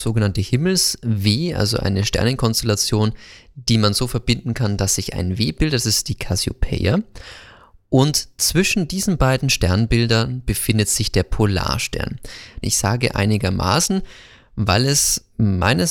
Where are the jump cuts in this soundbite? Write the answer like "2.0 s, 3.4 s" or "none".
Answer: 12.6 s